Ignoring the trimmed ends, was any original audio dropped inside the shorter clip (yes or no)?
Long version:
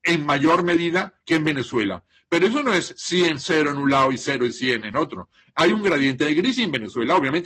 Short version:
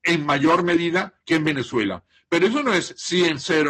no